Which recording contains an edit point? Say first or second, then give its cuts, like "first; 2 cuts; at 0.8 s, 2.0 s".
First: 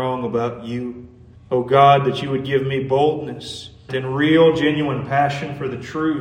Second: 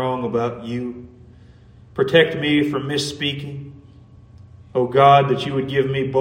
first; 2 cuts; at 1.4 s, 3.9 s